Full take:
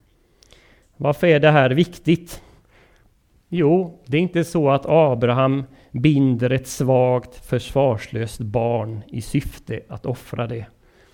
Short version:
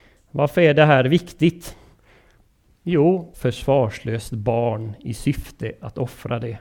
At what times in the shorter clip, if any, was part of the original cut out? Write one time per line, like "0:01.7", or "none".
0:03.3